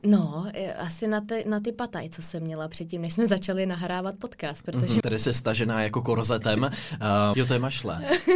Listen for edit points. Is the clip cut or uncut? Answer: cut